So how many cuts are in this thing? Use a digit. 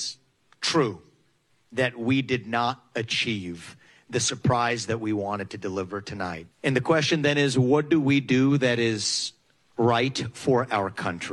1